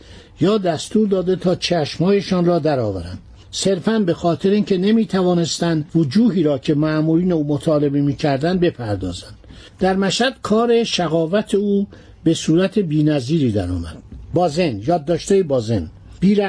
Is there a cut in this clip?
yes; 1 cut; at 5.9 s

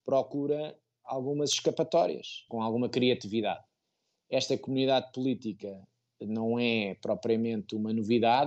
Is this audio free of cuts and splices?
yes; 0 cuts

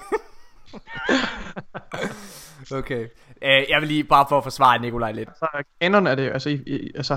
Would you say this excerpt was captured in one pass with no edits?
no; 1 cut; at 5.3 s

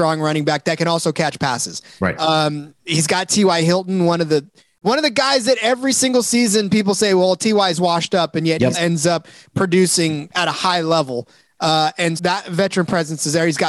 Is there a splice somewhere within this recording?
yes; 2 cuts; at 8.7 s, 12.2 s

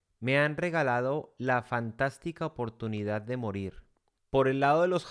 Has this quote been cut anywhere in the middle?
yes; 1 cut; at 4.2 s

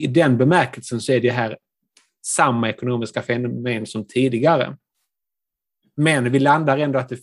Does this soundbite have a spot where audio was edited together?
no; 0 cuts

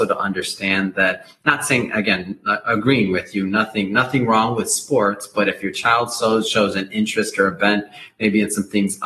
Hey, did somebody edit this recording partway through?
no; 0 cuts

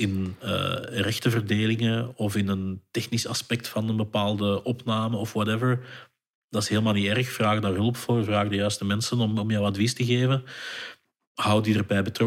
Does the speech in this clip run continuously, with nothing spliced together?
yes; 0 cuts

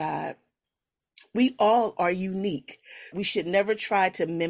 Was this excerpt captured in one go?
no; 1 cut; at 3.1 s

